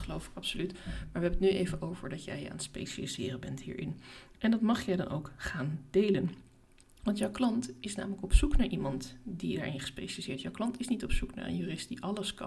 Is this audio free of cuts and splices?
yes; 0 cuts

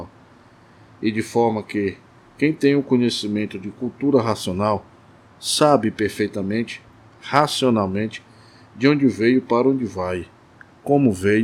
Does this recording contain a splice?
no; 0 cuts

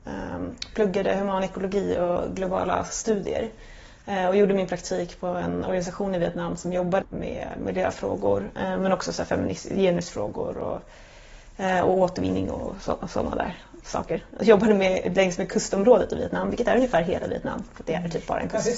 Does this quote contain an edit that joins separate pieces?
yes; 1 cut; at 7.0 s

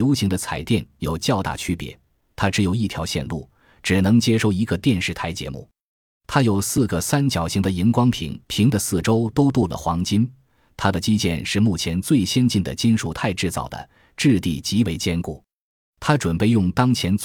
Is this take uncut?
no; 2 cuts; at 8.4 s, 15.8 s

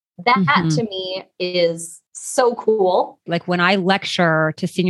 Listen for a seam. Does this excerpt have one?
yes; 1 cut; at 3.3 s

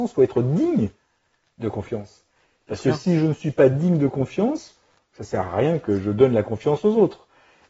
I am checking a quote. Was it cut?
no; 0 cuts

